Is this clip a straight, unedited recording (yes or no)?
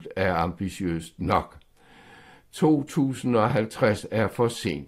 yes